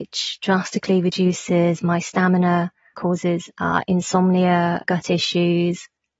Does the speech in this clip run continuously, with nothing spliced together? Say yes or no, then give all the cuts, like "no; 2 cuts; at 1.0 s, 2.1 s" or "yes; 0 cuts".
no; 2 cuts; at 2.9 s, 4.8 s